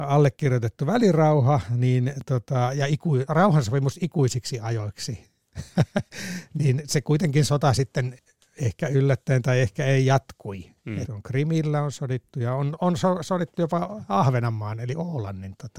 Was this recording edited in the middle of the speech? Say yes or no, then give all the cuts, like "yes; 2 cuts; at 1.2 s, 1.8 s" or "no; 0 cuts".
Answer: yes; 1 cut; at 11.0 s